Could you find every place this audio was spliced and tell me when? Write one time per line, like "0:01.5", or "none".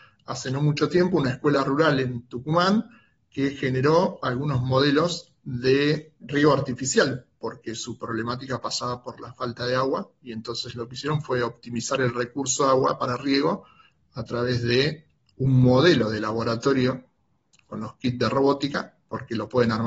0:06.2